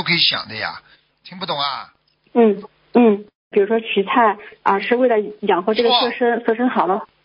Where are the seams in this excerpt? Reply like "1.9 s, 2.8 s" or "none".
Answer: 1.1 s, 3.5 s